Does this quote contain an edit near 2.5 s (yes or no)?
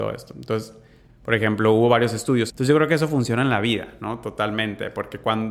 yes